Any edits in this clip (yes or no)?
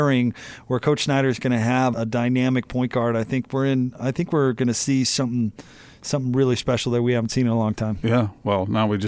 yes